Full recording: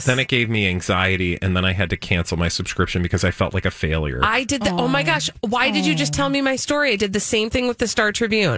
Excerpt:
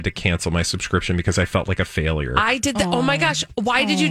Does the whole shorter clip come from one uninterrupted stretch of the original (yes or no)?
yes